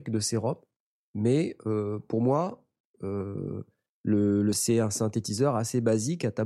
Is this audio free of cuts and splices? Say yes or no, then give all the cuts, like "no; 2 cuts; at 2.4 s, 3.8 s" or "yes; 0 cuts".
no; 1 cut; at 4.5 s